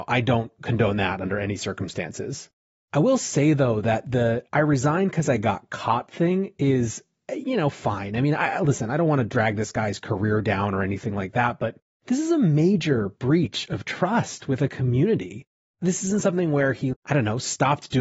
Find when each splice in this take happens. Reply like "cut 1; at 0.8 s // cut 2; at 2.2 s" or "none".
cut 1; at 16.9 s